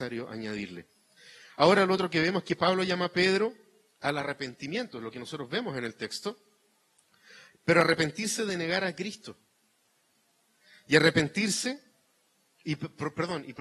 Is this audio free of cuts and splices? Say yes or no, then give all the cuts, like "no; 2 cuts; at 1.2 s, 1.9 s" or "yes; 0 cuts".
yes; 0 cuts